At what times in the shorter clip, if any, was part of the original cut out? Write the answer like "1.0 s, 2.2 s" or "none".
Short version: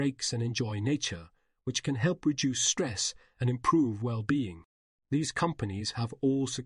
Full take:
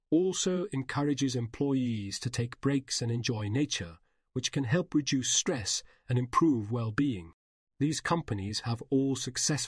none